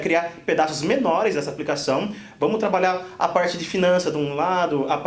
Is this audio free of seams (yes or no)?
yes